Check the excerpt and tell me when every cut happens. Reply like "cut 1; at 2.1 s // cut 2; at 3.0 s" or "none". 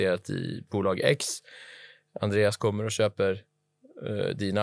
none